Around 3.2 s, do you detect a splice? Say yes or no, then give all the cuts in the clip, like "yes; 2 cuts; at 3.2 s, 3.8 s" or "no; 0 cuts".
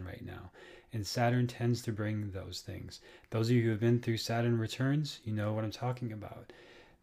no; 0 cuts